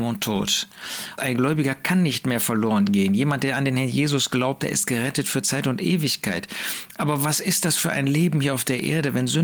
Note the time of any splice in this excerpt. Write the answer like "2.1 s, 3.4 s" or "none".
1.2 s